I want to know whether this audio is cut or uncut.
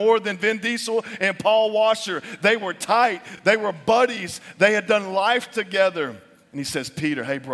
uncut